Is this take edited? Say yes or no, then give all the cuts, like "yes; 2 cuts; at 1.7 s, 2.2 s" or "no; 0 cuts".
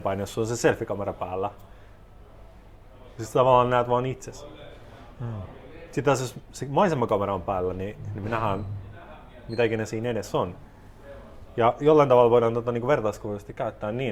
no; 0 cuts